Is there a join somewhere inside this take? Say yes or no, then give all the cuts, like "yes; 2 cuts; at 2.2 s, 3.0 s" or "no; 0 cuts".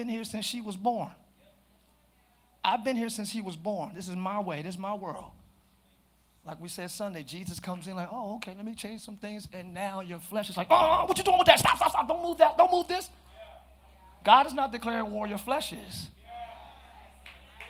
no; 0 cuts